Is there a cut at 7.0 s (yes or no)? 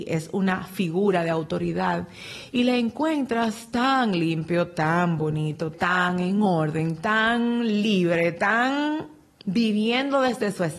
no